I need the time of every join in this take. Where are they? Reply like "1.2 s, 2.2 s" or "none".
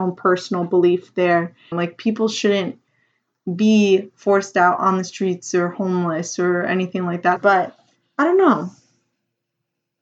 1.7 s, 7.4 s